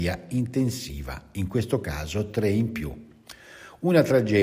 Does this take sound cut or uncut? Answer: uncut